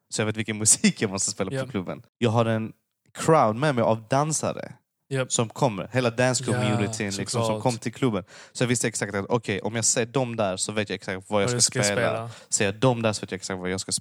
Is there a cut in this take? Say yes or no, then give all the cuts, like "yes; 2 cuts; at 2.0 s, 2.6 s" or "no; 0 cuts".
yes; 1 cut; at 2.1 s